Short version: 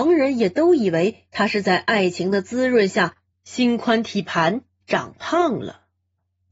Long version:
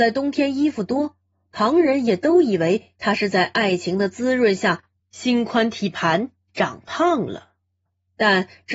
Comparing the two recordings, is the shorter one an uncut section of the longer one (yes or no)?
yes